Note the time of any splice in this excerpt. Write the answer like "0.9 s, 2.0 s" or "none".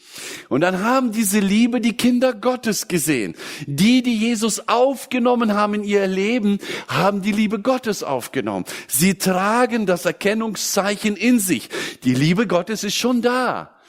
none